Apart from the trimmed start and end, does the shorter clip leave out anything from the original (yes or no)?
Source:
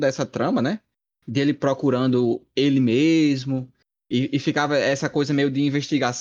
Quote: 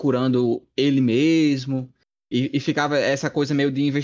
no